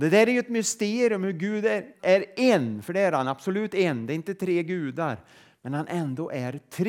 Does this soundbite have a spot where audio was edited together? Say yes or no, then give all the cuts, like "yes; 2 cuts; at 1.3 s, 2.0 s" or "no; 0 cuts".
yes; 1 cut; at 2.0 s